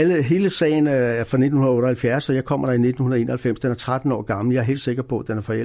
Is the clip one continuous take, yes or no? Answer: yes